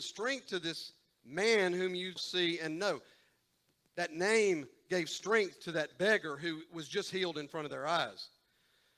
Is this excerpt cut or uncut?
cut